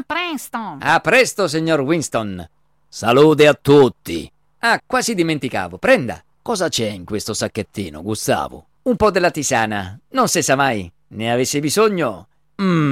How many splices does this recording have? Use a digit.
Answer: 1